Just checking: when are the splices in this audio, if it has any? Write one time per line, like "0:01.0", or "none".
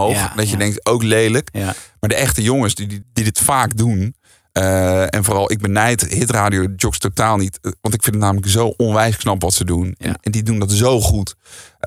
0:03.0
0:10.0